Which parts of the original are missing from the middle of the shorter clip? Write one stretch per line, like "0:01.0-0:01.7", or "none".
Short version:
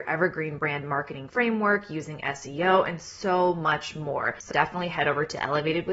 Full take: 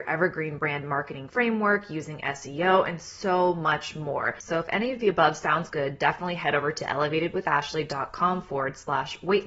0:04.5-0:06.0